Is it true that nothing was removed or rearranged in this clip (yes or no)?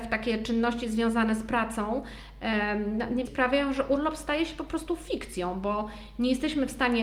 no